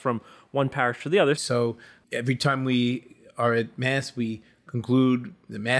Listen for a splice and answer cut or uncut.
cut